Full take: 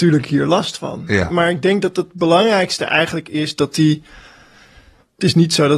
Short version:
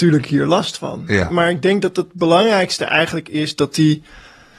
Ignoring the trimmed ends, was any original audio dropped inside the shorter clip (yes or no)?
no